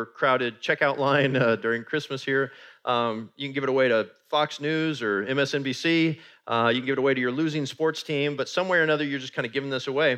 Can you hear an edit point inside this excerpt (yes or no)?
yes